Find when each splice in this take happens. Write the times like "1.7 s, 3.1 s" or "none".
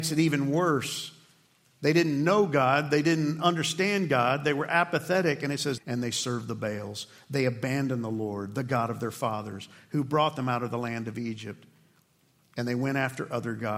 5.8 s

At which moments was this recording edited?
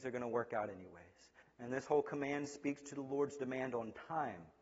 1.4 s

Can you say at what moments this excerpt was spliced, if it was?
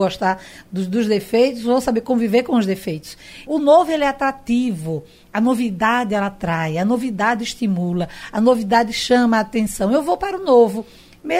3.5 s

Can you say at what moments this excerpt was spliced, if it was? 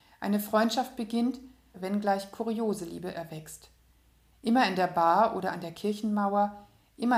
1.7 s

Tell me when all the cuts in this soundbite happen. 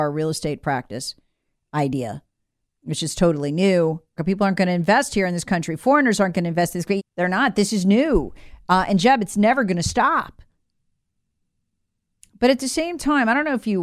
4.2 s, 7.0 s

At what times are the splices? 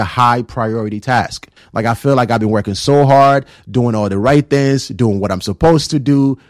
1.6 s

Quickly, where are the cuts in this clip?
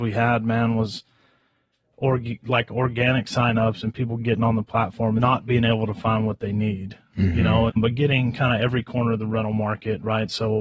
5.2 s, 7.7 s

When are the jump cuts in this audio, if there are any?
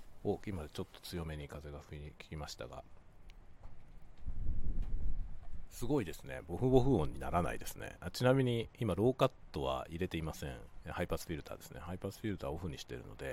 10.8 s

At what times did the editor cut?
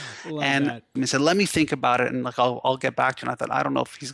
1.0 s

